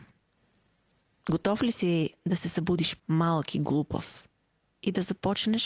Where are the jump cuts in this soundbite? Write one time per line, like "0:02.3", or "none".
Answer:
0:03.0

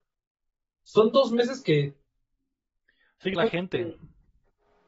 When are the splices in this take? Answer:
0:03.4

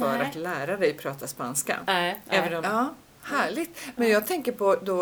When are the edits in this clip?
0:02.6

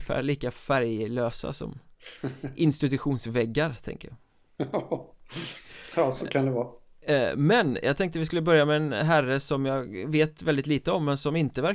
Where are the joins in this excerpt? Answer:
none

